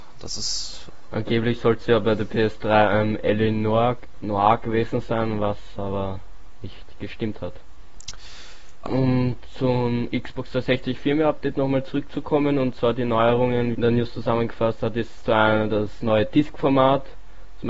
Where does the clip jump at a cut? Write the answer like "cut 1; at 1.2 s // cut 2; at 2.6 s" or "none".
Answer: cut 1; at 8.8 s // cut 2; at 13.7 s